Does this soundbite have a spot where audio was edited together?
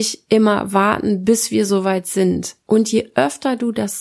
yes; 1 cut; at 2.6 s

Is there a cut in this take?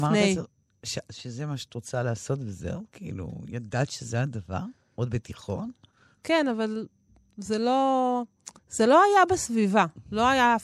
yes; 2 cuts; at 6.2 s, 8.6 s

